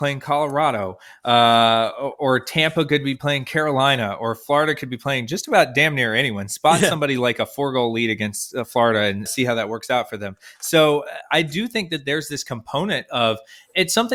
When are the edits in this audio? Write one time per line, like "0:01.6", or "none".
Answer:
0:09.3